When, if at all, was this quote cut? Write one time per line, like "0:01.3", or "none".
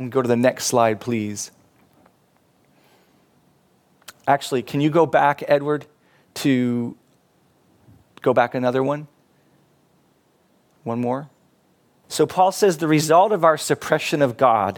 0:12.0